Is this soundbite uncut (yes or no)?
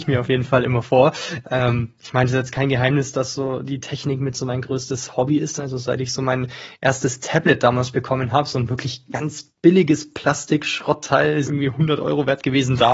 no